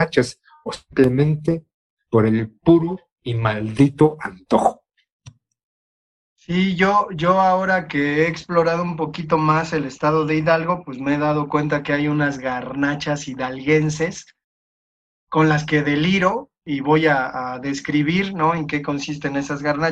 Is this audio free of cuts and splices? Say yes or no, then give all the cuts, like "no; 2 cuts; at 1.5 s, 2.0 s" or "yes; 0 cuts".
yes; 0 cuts